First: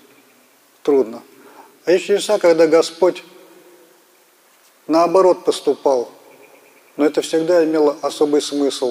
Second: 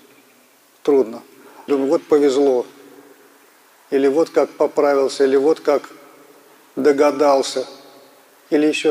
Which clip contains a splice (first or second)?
second